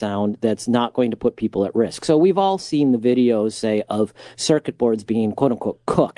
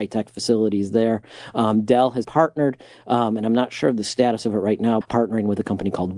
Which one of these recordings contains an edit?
second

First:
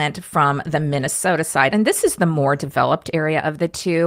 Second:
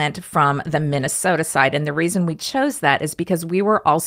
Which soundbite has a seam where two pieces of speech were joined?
first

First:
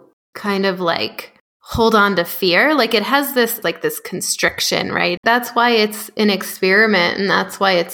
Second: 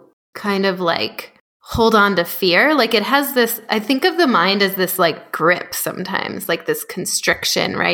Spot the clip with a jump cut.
first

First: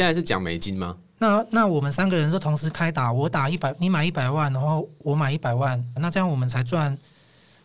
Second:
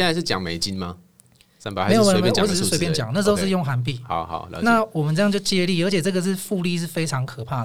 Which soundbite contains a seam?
first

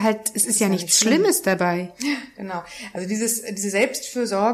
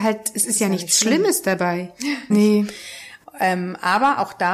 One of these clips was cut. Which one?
second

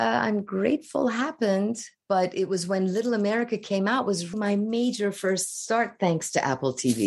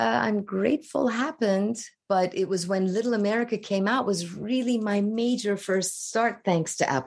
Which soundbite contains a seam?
first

